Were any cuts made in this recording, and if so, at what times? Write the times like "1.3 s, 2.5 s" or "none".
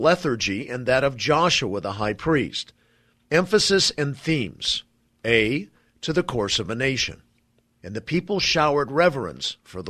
3.2 s, 7.8 s